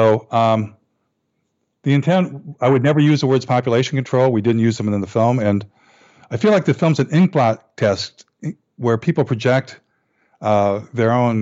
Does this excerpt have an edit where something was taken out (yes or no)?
no